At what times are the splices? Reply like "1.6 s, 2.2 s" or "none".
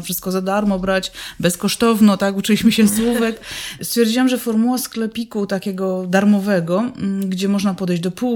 3.8 s